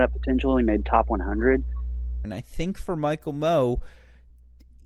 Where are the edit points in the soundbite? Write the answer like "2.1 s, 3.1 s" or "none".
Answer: 2.2 s